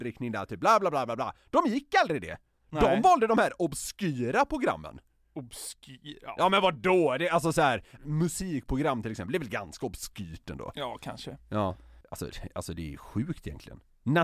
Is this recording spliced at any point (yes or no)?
yes